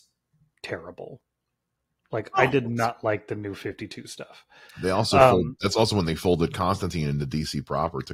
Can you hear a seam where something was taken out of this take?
yes; 1 cut; at 4.7 s

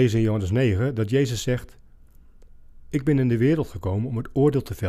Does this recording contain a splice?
no; 0 cuts

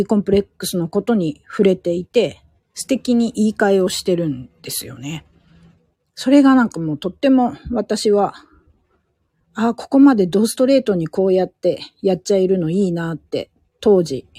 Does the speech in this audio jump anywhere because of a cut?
no; 0 cuts

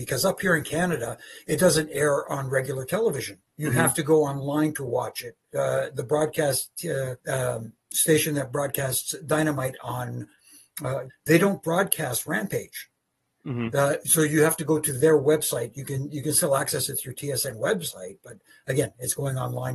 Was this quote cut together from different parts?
yes; 3 cuts; at 3.5 s, 7.2 s, 11.1 s

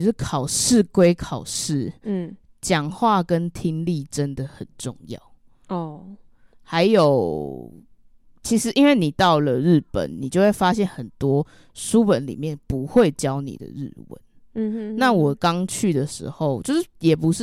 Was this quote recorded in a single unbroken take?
yes; 0 cuts

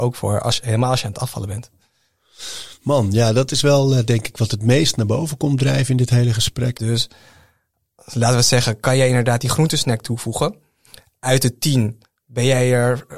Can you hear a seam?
yes; 1 cut; at 6.7 s

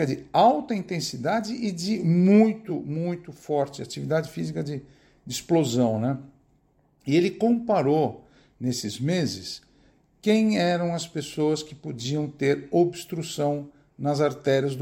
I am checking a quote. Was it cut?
no; 0 cuts

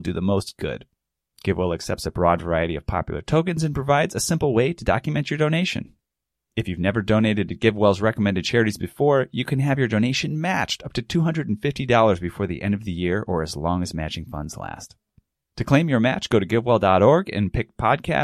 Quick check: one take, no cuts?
yes; 0 cuts

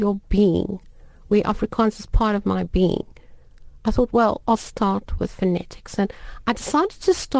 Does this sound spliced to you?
yes; 1 cut; at 6.0 s

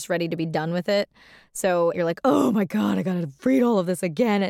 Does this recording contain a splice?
yes; 1 cut; at 1.9 s

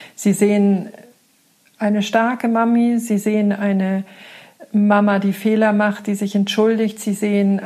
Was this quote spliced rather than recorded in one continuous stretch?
no; 0 cuts

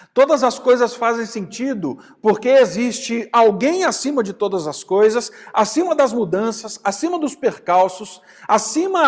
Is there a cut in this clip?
no; 0 cuts

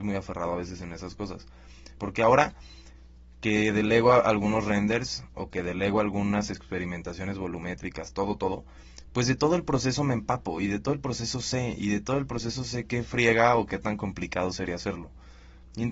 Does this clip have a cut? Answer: yes; 1 cut; at 2.0 s

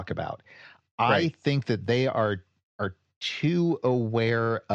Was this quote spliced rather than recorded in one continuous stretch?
no; 0 cuts

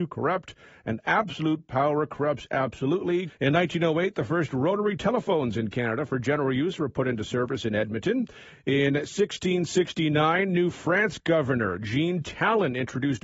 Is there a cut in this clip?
yes; 2 cuts; at 3.3 s, 8.5 s

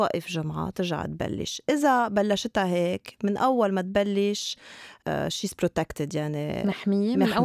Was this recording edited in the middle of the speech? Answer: no; 0 cuts

